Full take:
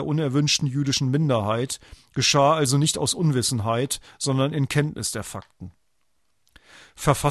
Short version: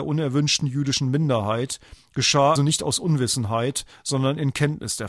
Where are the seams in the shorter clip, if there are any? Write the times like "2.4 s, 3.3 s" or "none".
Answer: 2.6 s